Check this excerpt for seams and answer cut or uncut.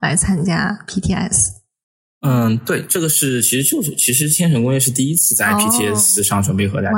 uncut